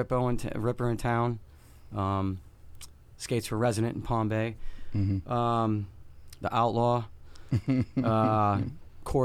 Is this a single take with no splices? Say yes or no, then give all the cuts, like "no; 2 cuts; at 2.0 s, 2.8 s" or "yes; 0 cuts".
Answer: no; 1 cut; at 6.4 s